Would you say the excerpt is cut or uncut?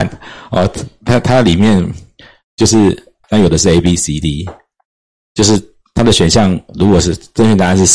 cut